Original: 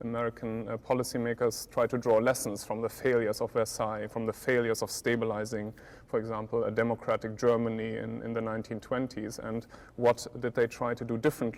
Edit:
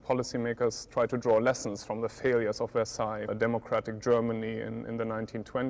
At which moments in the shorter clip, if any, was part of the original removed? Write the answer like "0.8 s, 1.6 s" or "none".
3.3 s

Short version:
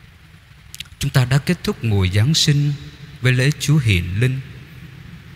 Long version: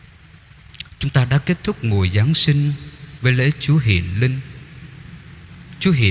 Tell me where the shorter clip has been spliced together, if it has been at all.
none

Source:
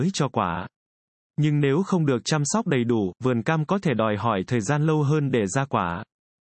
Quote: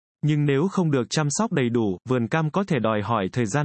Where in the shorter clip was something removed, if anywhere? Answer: none

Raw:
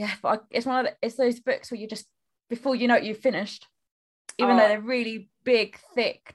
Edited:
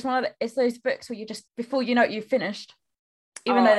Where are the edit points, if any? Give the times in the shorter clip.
1.5 s

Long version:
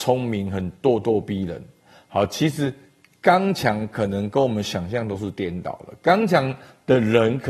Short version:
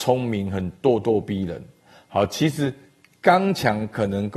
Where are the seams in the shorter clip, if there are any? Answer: none

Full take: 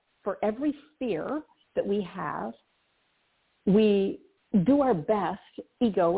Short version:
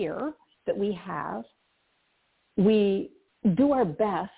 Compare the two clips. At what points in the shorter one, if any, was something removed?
none

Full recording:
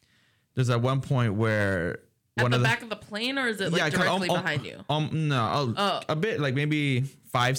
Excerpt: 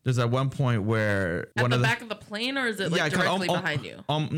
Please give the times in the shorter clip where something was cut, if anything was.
1.5 s

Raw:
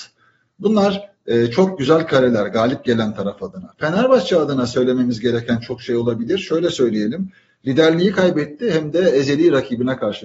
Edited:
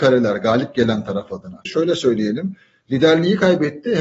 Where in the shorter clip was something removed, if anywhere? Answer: 1.7 s

